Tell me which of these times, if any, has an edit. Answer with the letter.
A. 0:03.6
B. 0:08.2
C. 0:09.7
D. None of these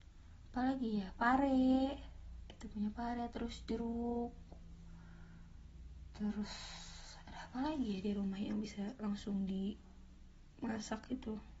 A